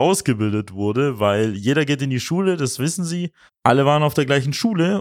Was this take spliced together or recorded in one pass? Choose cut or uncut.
cut